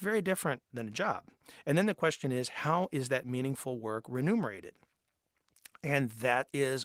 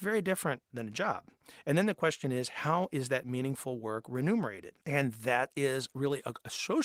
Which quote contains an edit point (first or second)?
second